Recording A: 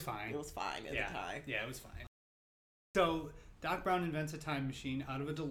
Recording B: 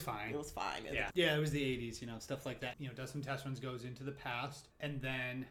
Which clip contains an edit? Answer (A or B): B